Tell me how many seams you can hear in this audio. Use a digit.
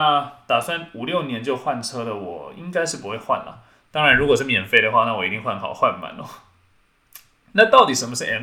0